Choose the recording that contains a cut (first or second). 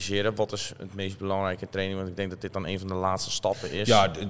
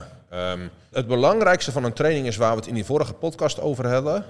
second